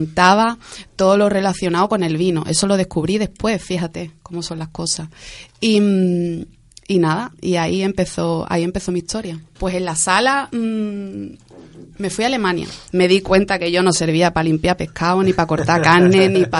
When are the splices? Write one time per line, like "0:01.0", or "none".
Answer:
0:09.6
0:12.9